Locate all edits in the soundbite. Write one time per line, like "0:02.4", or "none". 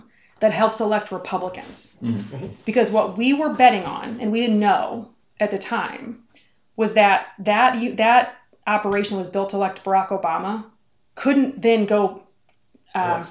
none

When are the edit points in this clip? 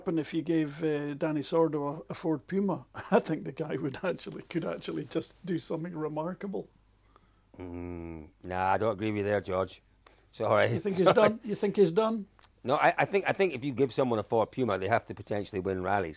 none

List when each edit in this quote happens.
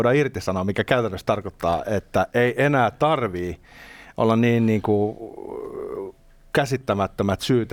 none

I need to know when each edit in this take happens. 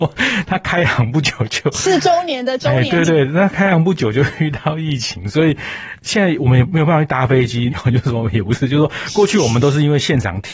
0:03.0
0:07.7

